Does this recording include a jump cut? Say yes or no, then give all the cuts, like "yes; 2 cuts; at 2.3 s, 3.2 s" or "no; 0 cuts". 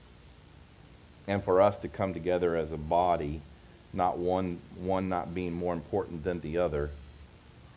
no; 0 cuts